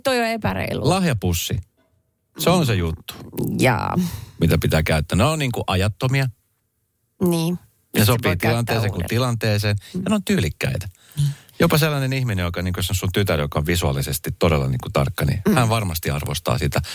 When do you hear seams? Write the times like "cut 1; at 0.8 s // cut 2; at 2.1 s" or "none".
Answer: none